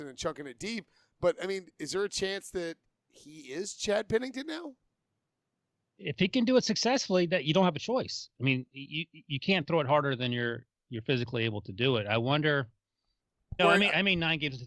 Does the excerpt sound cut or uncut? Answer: cut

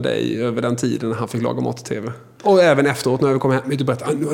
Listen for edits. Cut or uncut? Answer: uncut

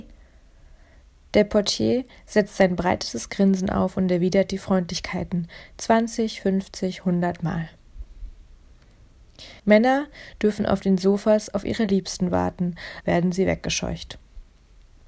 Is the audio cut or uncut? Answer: cut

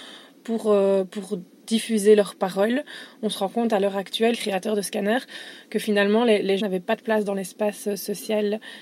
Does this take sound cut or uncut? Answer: cut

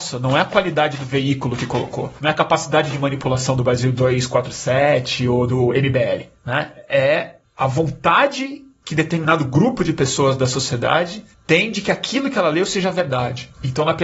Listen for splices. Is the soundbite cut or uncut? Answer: uncut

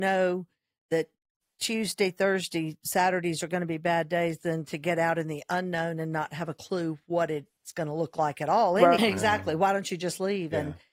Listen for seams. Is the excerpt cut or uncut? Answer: cut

